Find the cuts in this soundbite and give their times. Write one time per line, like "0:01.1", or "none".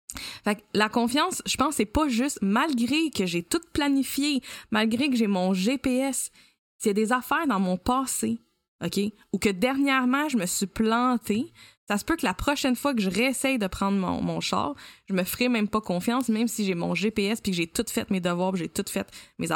none

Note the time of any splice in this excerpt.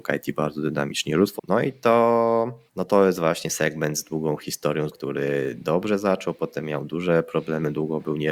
0:01.4
0:02.7
0:04.9

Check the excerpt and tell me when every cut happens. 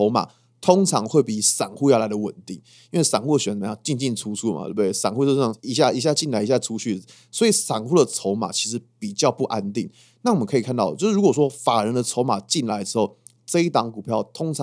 none

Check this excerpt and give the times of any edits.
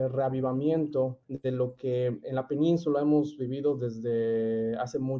0:01.2

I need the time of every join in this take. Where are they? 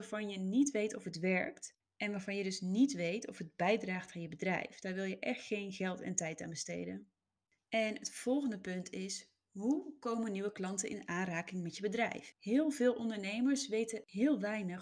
0:07.6
0:12.3

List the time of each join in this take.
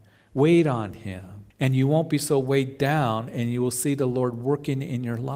0:01.5

